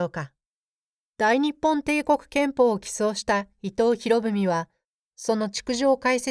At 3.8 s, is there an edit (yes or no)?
no